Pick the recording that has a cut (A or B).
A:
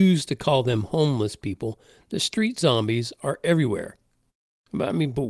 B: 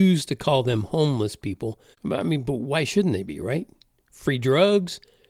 B